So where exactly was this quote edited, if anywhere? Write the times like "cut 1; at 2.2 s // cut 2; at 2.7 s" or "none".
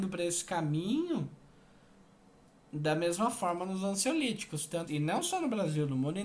cut 1; at 4.9 s